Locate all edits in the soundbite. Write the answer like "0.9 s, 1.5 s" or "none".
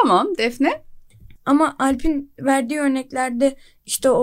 1.4 s